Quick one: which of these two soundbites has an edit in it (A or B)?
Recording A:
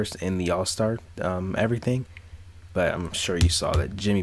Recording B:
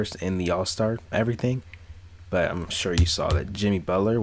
B